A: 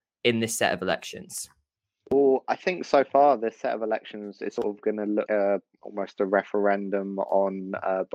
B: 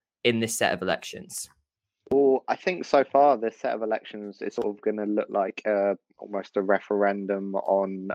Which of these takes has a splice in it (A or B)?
A